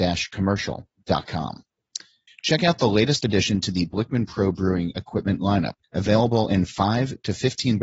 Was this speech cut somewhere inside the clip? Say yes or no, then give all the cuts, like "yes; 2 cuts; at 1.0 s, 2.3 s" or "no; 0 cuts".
yes; 2 cuts; at 2.3 s, 5.8 s